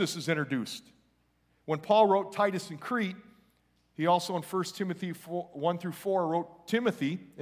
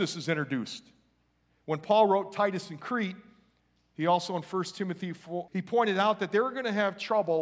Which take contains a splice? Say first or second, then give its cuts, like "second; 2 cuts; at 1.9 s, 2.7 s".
second; 1 cut; at 5.5 s